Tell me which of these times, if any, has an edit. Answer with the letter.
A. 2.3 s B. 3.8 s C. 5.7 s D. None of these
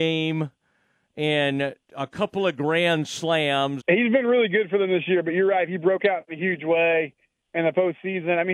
B